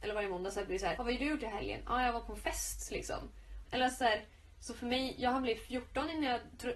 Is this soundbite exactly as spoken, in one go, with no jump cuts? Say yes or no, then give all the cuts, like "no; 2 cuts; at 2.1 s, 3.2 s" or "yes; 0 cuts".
no; 2 cuts; at 1.0 s, 3.7 s